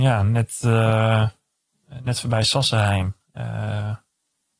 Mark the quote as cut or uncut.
uncut